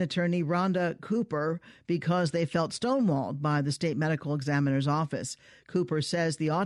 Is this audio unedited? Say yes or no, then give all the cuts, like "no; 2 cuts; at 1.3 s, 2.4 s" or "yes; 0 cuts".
yes; 0 cuts